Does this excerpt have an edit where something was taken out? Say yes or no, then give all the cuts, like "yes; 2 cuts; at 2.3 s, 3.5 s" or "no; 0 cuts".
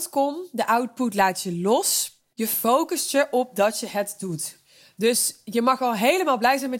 yes; 1 cut; at 2.3 s